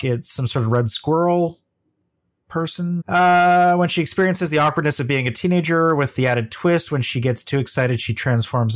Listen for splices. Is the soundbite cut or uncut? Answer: cut